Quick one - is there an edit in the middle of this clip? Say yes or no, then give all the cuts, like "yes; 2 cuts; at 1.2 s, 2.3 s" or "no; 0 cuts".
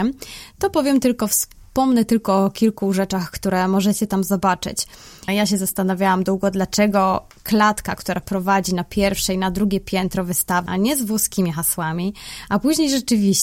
yes; 2 cuts; at 5.3 s, 10.7 s